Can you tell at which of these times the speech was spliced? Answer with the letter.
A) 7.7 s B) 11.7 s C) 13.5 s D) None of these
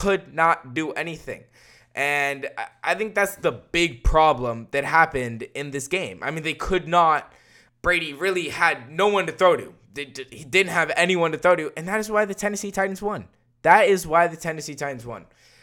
A